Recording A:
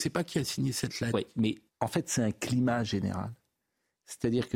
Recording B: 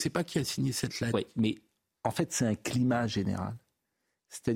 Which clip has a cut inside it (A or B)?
A